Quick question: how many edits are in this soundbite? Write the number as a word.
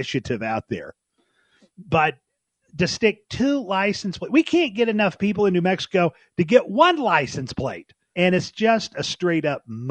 one